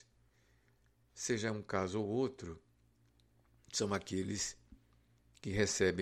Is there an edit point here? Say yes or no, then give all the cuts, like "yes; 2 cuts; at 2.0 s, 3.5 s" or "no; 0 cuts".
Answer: no; 0 cuts